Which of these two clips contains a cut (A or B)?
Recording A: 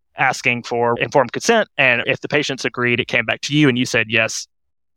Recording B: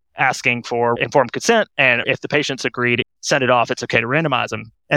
B